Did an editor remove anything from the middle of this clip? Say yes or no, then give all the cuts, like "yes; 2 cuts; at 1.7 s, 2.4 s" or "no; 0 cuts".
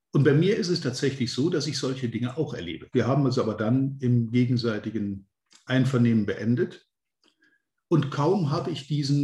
yes; 1 cut; at 2.9 s